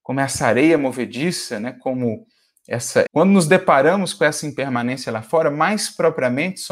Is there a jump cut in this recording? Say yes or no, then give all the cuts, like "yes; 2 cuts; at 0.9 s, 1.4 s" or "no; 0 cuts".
yes; 1 cut; at 3.1 s